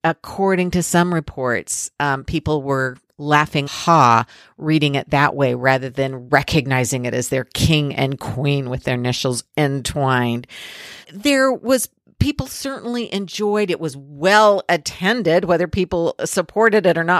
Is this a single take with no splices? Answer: no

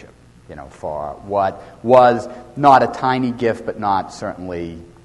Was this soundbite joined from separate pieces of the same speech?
no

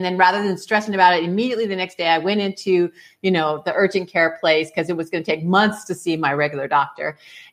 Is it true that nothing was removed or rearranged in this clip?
yes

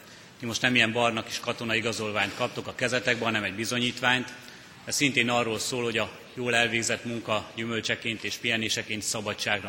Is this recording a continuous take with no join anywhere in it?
yes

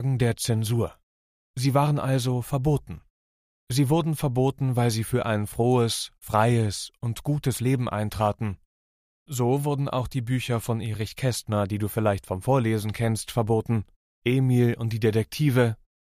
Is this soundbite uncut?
yes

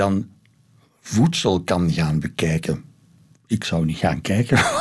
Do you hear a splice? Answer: no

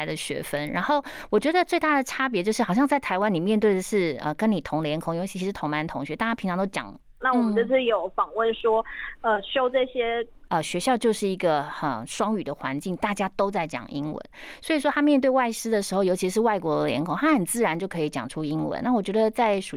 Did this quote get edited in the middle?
yes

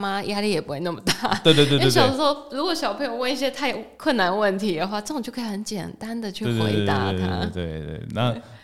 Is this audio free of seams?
yes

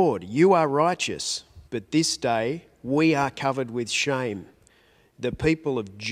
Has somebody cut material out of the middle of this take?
yes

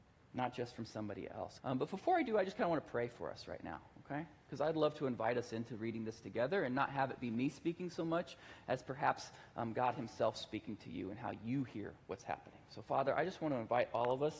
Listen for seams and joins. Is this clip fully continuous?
no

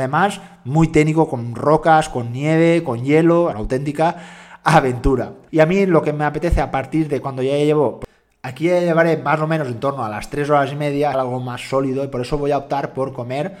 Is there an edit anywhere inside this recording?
yes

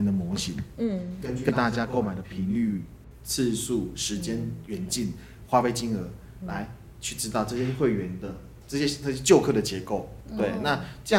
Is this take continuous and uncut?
yes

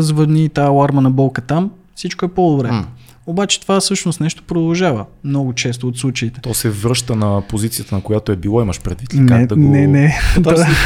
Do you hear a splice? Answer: no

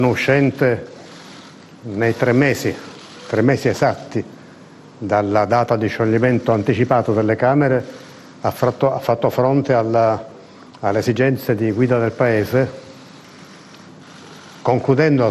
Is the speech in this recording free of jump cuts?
yes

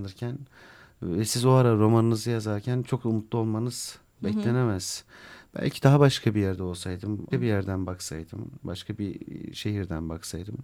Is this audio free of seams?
no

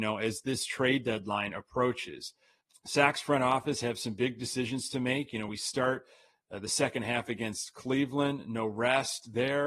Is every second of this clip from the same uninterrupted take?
yes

